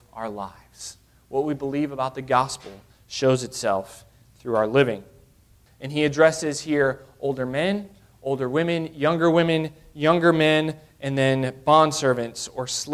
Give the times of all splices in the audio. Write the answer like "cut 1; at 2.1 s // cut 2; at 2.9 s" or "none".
cut 1; at 5.7 s